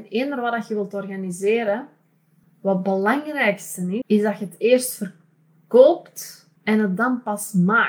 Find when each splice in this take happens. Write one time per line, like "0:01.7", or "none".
0:02.4
0:04.0
0:06.6